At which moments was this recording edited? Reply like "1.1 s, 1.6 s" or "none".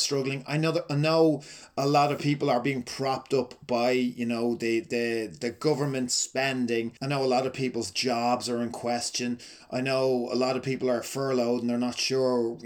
7.0 s